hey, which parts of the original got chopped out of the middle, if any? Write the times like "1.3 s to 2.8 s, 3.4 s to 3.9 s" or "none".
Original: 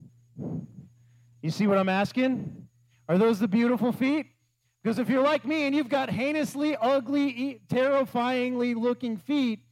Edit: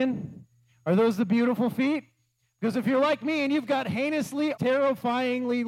6.8 s to 7.7 s